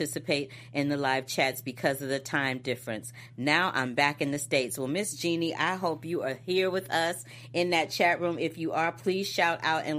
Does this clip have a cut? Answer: no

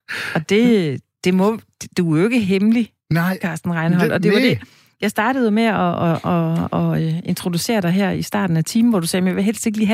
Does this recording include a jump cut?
no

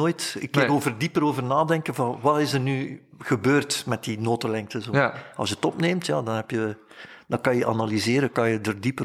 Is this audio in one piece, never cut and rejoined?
yes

